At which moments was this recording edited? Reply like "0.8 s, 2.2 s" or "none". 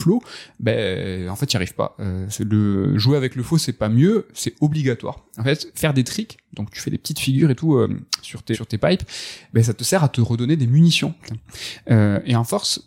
8.5 s, 11.3 s